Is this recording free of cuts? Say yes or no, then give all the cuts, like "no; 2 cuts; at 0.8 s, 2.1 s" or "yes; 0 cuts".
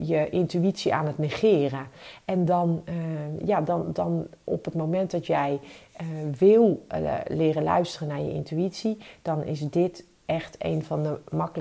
yes; 0 cuts